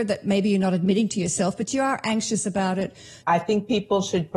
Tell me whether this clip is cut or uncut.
cut